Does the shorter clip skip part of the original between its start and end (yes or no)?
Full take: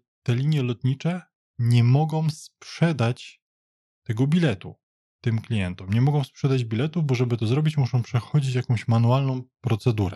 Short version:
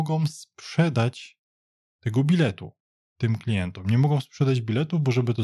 no